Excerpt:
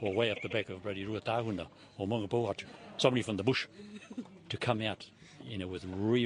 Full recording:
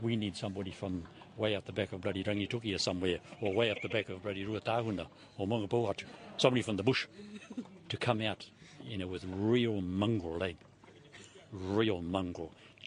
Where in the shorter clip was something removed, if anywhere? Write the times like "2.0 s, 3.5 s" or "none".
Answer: none